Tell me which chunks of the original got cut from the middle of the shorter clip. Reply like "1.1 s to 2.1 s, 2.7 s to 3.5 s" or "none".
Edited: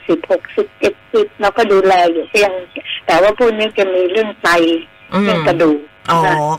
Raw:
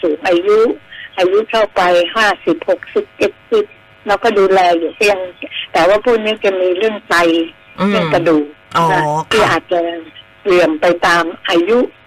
3.7 s to 4.0 s